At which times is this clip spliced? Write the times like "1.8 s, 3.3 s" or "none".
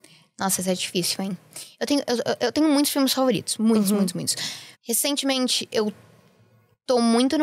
4.7 s